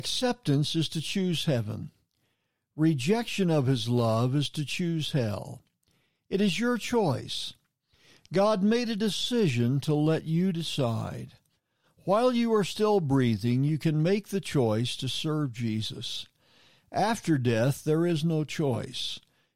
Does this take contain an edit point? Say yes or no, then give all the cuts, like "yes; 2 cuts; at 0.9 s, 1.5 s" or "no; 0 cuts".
no; 0 cuts